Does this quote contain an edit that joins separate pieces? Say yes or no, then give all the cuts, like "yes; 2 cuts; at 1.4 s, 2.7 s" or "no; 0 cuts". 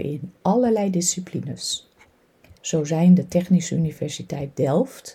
yes; 1 cut; at 2.6 s